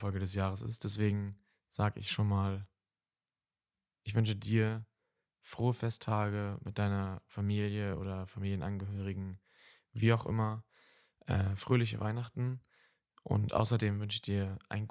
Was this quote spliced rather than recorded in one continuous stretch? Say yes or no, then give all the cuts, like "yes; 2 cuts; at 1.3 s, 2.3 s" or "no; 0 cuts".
no; 0 cuts